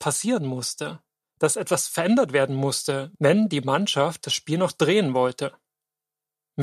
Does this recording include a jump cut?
no; 0 cuts

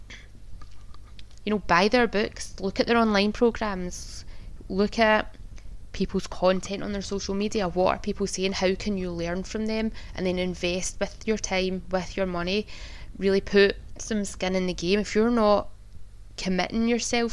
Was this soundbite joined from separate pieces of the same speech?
yes; 1 cut; at 1.4 s

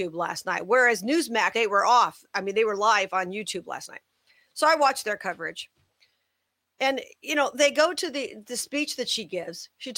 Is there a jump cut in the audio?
yes; 1 cut; at 1.5 s

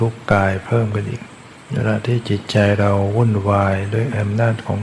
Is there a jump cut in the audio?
yes; 1 cut; at 1.6 s

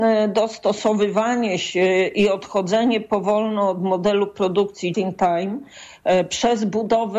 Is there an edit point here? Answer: yes; 1 cut; at 4.9 s

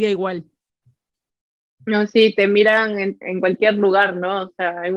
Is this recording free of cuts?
no; 1 cut; at 3.2 s

